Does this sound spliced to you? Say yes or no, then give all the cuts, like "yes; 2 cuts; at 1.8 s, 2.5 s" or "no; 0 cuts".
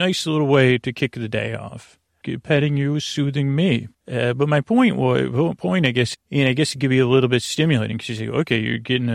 yes; 3 cuts; at 2.2 s, 3.9 s, 6.1 s